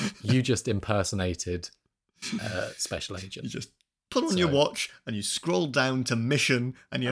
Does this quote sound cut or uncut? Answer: uncut